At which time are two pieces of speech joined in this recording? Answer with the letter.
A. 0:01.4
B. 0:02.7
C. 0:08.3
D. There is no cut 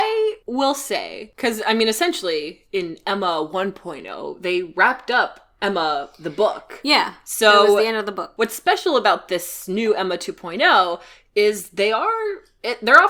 D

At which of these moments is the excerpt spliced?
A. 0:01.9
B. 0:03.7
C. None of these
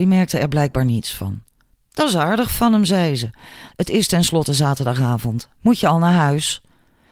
B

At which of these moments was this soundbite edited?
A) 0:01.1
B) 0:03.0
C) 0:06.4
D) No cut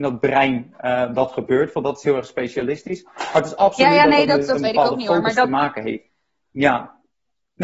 C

